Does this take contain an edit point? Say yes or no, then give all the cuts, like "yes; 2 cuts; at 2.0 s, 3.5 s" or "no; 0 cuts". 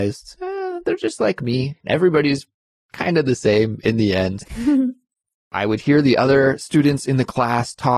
yes; 2 cuts; at 1.8 s, 4.4 s